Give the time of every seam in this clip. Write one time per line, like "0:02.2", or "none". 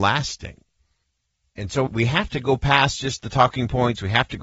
0:01.9

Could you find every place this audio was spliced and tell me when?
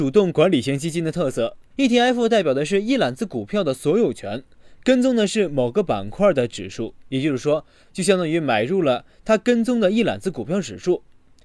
0:01.7
0:07.8

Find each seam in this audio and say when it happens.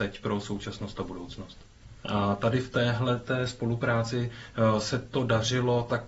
0:02.0

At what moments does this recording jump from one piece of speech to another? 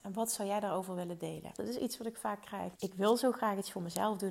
0:01.6
0:02.8

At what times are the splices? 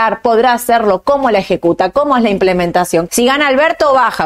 0:03.1

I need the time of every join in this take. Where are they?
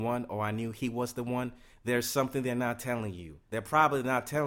0:03.4

